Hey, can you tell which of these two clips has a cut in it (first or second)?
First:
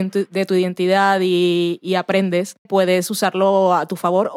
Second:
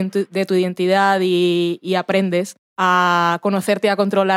first